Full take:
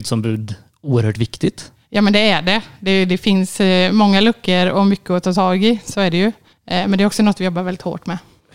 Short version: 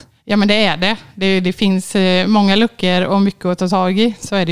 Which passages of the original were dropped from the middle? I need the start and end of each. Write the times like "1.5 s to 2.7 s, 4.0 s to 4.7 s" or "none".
none